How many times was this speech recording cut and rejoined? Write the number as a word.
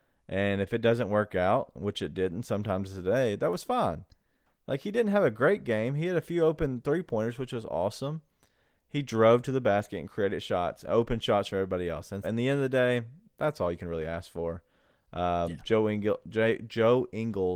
one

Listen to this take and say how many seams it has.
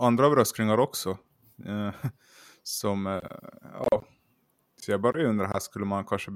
zero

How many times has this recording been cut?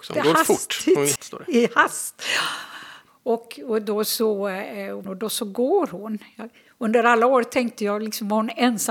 three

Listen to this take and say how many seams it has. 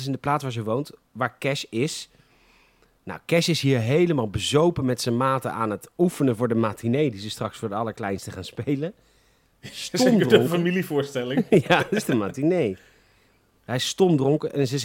zero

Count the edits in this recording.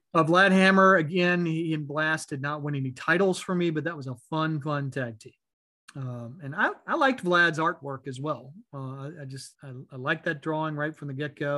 one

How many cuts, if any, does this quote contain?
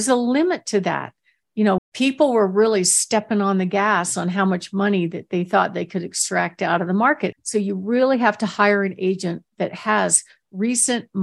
two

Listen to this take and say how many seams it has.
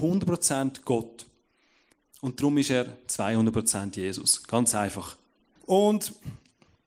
one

